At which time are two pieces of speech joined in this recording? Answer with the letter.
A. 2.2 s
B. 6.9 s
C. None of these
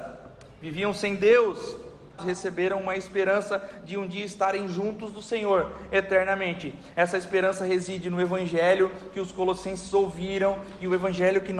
A